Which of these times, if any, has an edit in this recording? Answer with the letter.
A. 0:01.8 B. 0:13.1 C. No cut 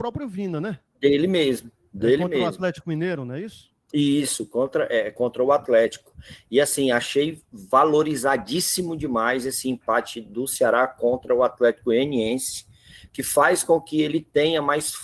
C